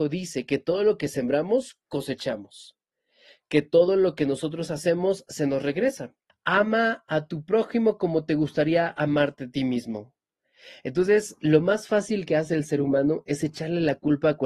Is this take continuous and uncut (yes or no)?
no